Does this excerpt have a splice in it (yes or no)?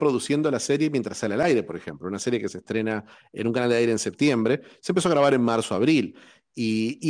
no